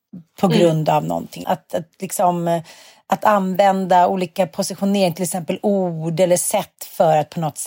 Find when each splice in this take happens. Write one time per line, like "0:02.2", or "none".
0:01.4